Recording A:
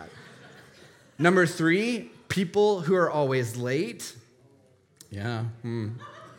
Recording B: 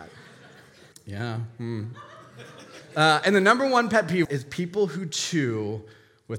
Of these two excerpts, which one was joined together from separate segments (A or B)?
B